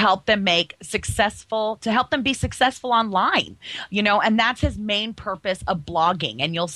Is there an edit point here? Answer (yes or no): no